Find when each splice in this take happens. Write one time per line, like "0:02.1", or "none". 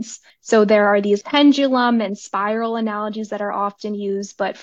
0:01.2